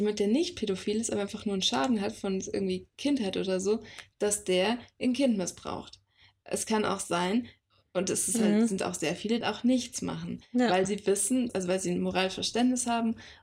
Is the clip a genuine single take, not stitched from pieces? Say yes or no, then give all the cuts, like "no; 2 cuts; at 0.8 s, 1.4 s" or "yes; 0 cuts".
no; 2 cuts; at 9.4 s, 11.5 s